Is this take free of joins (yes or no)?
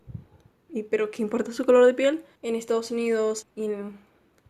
no